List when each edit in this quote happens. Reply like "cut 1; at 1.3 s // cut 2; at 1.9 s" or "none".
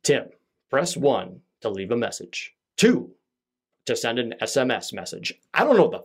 none